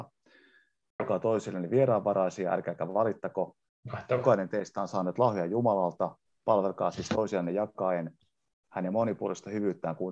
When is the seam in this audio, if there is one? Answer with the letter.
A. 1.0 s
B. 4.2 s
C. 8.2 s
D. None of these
A